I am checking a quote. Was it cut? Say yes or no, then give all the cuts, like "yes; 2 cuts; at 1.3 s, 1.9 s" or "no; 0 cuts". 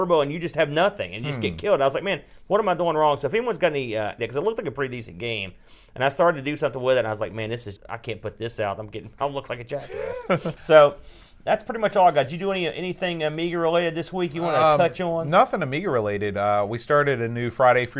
yes; 3 cuts; at 4.2 s, 7.8 s, 10.6 s